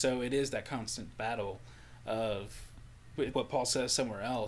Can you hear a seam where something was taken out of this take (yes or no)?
yes